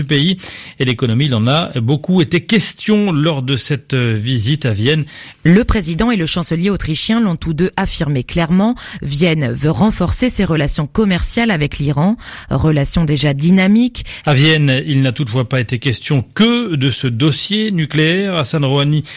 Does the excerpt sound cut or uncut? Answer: cut